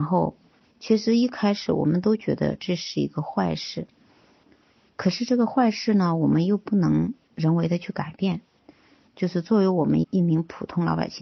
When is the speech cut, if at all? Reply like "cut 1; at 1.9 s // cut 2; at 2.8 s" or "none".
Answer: cut 1; at 10.0 s